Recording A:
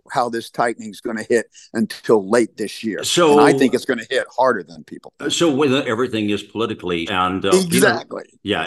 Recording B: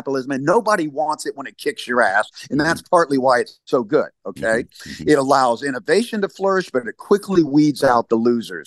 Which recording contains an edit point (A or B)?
A